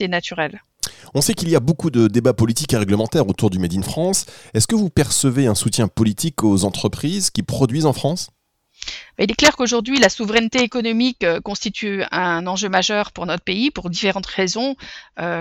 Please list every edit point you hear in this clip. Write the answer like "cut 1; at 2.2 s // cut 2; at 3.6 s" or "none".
none